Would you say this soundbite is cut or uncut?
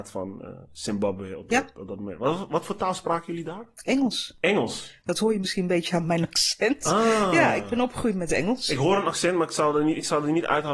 uncut